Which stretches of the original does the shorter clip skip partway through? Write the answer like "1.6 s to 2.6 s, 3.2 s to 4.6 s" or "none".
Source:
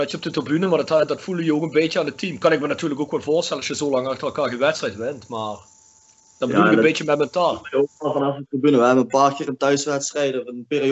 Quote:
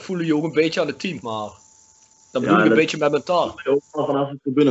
2.4 s to 5.3 s